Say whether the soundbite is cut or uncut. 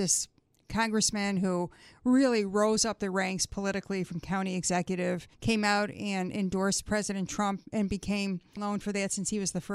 cut